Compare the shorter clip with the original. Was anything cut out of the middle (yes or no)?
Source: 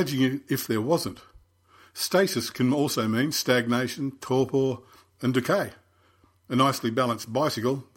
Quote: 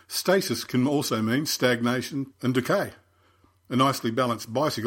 yes